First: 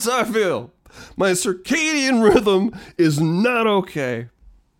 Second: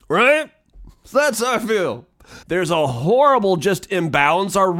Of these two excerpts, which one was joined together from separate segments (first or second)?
second